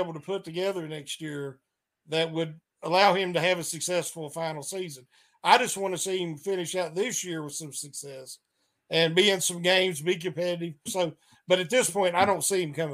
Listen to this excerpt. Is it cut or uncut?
cut